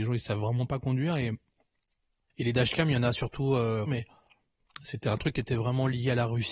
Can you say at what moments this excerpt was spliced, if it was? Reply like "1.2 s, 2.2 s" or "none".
3.8 s